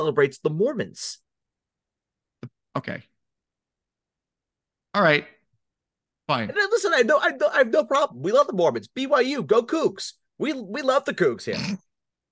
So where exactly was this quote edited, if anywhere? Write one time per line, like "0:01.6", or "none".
none